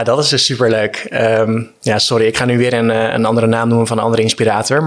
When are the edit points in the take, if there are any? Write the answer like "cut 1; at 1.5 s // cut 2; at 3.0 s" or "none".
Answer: none